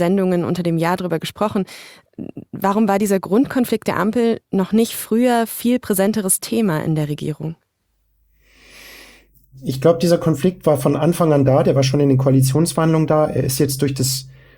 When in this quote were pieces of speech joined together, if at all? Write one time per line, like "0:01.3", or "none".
none

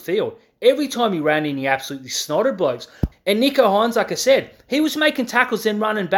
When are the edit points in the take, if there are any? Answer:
0:03.1

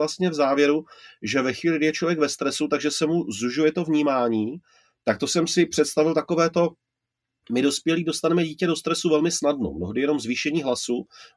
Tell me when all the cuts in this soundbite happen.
none

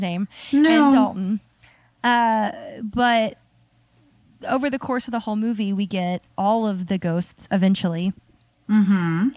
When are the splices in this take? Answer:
none

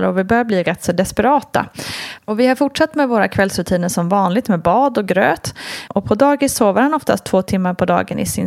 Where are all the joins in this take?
0:02.2
0:05.9

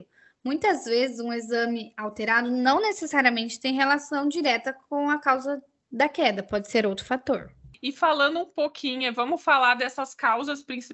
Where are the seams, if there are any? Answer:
0:09.0

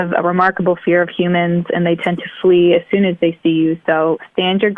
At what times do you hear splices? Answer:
none

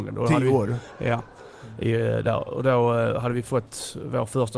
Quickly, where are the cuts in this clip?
none

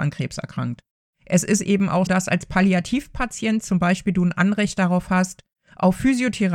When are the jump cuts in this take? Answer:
0:02.1

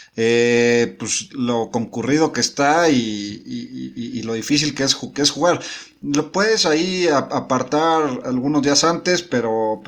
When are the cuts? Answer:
0:08.2

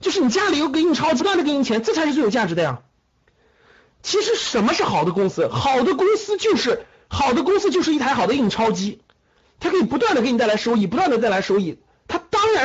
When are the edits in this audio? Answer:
0:01.2

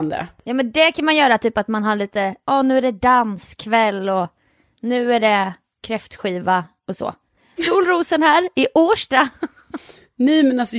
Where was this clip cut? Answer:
0:07.6

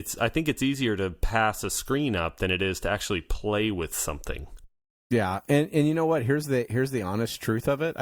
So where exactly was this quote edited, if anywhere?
none

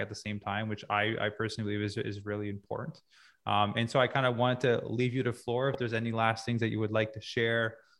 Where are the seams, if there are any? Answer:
none

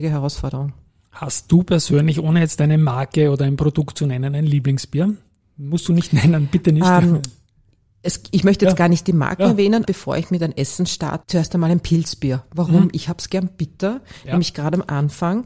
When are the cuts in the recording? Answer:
0:09.8
0:11.2

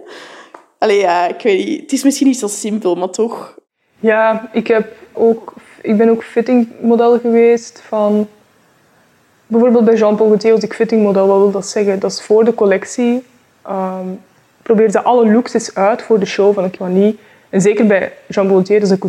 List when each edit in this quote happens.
0:05.1
0:16.8

